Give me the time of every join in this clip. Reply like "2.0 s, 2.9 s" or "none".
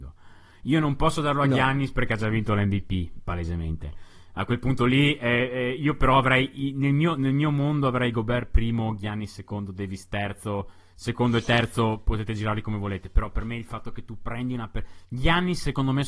none